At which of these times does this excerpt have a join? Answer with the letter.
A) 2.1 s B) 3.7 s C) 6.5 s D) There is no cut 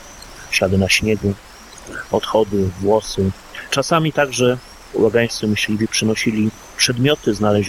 B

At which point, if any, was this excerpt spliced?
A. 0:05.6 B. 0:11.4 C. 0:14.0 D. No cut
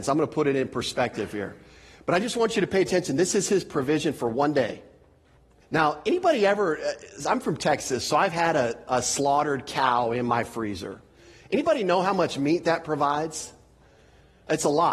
A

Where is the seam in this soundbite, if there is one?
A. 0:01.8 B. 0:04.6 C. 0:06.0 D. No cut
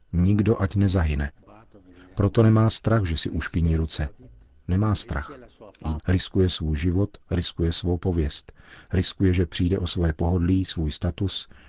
C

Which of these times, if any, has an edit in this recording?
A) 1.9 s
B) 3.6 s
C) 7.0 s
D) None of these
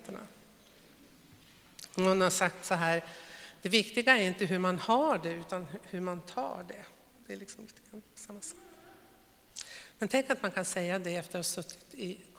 D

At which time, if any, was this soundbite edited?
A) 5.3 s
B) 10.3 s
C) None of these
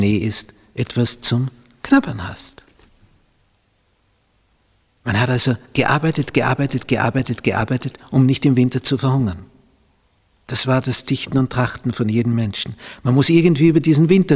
C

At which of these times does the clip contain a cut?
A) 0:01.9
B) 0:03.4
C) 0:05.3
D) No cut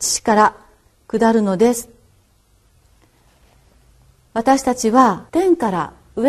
C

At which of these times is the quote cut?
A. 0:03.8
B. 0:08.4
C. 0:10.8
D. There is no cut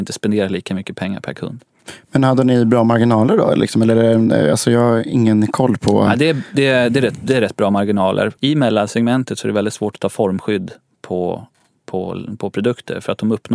B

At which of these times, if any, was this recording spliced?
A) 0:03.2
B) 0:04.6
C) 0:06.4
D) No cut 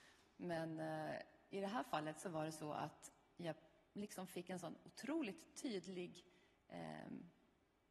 D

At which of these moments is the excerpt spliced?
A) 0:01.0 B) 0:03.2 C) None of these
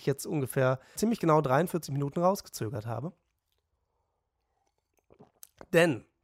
A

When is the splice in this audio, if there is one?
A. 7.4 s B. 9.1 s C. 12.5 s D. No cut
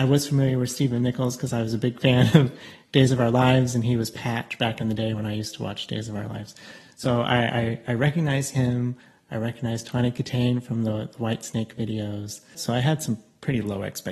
C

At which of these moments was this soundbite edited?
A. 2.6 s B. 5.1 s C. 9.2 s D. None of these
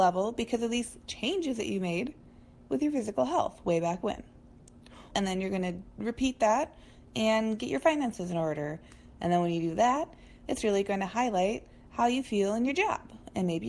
B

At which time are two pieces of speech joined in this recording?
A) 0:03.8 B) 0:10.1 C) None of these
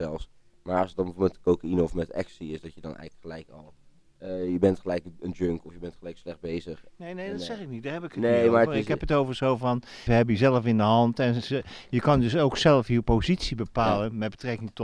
B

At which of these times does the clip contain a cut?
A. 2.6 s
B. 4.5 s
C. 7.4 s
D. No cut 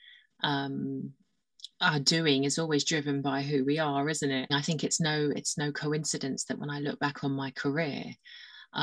B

